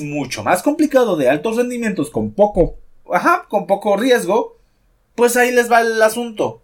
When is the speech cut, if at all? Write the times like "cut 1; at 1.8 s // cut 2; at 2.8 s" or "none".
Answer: cut 1; at 3.0 s